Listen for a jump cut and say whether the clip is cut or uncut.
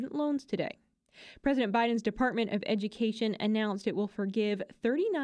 uncut